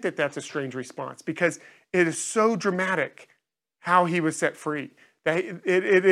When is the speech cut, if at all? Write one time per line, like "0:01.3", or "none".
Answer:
none